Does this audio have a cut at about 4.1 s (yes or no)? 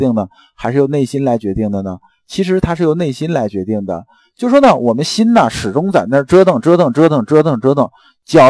no